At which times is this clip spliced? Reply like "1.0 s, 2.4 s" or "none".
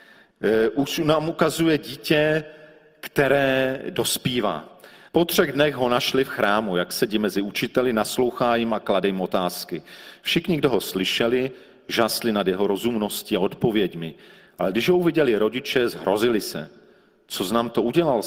5.1 s